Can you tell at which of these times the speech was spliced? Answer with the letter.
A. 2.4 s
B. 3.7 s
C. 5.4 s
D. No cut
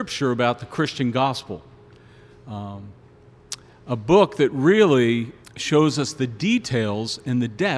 C